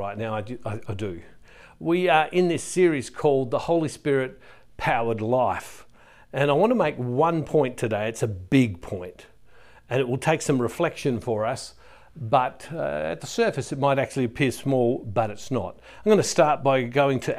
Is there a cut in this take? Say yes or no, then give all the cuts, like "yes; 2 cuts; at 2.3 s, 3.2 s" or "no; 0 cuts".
no; 0 cuts